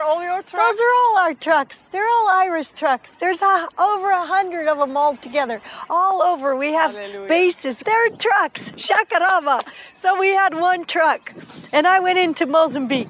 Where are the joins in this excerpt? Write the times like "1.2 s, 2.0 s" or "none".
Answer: 7.8 s